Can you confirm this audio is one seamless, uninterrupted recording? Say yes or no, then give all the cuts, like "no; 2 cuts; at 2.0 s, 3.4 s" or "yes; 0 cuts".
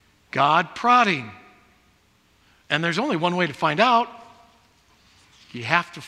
yes; 0 cuts